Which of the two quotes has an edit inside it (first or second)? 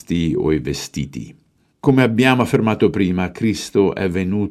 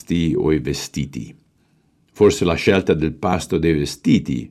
first